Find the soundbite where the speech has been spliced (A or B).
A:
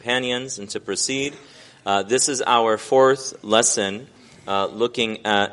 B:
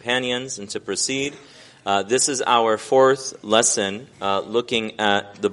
B